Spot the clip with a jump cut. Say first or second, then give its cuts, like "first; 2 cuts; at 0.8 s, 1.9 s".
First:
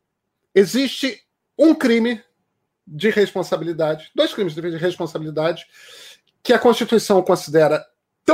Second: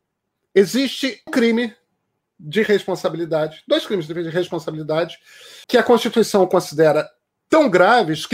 second; 2 cuts; at 1.3 s, 5.6 s